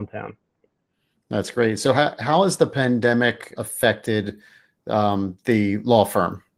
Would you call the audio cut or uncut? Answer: cut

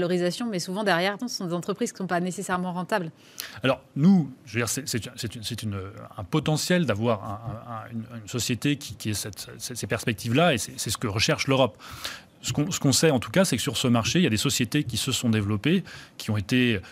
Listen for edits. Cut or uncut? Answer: cut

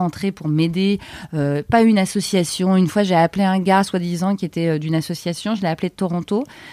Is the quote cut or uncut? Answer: uncut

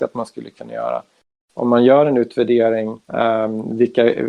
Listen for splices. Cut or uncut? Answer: cut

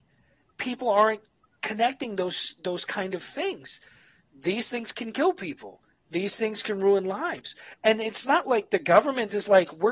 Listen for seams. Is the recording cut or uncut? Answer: uncut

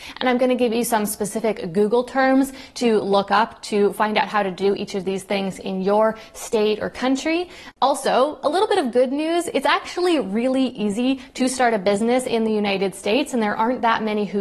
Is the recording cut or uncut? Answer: cut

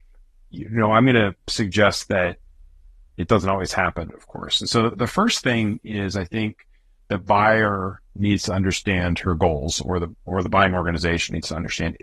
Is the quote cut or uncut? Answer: cut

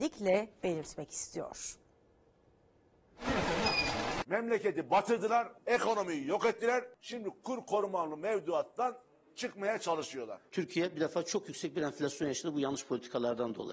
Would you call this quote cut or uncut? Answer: uncut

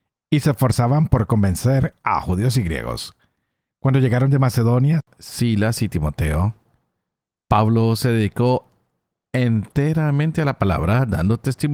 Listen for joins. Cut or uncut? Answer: uncut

